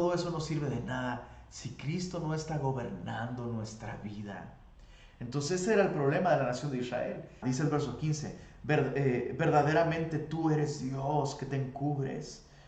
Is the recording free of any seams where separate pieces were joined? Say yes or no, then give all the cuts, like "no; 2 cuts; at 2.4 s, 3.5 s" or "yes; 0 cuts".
no; 1 cut; at 7.4 s